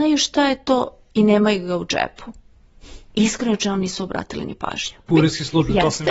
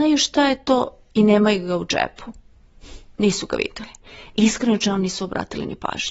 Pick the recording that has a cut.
first; 2 cuts; at 3.1 s, 5.1 s

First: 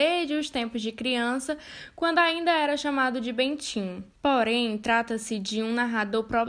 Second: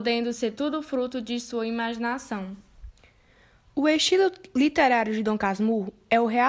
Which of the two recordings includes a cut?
first; 1 cut; at 4.1 s

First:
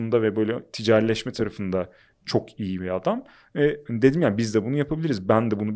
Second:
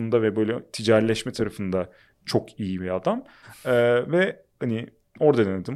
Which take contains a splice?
second; 1 cut; at 3.4 s

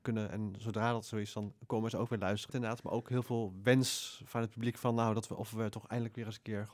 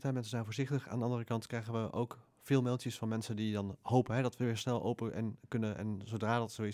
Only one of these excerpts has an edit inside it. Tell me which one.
first; 1 cut; at 2.5 s

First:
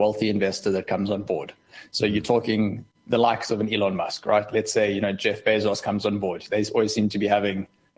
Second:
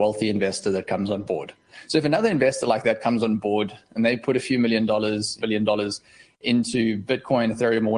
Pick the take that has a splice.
second; 2 cuts; at 1.9 s, 5.4 s

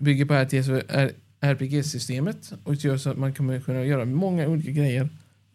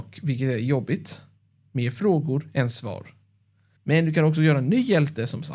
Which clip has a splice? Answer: second; 1 cut; at 3.8 s

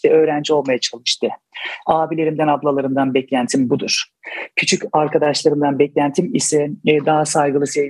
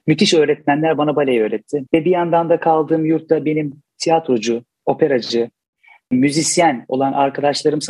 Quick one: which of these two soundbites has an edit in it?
second; 1 cut; at 1.9 s

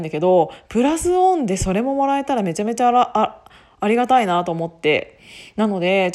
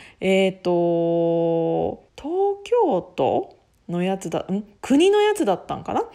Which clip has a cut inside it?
second; 1 cut; at 2.1 s

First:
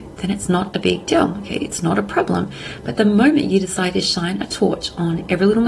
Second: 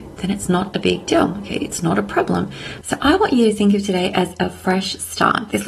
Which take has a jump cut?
second; 1 cut; at 2.8 s

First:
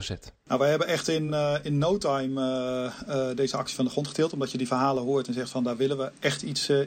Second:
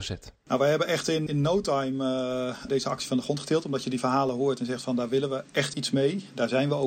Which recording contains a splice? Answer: second; 3 cuts; at 1.3 s, 2.7 s, 5.7 s

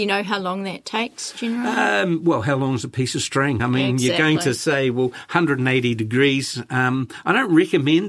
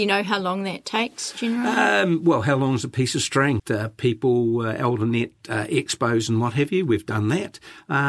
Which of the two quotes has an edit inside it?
second; 1 cut; at 3.6 s

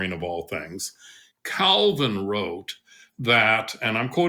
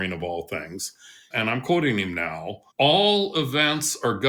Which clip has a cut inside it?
second; 2 cuts; at 1.3 s, 2.7 s

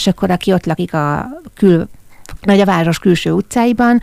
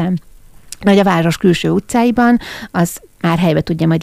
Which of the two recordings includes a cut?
first; 1 cut; at 2.4 s

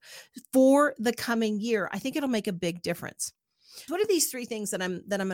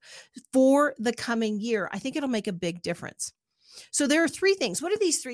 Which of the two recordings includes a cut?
first; 1 cut; at 3.9 s

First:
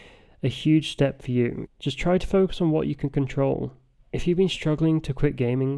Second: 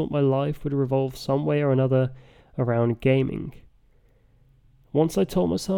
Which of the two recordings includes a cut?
first; 2 cuts; at 1.7 s, 4.0 s

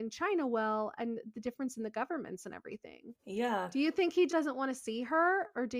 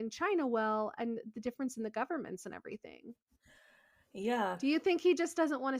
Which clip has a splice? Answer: first; 2 cuts; at 3.2 s, 4.3 s

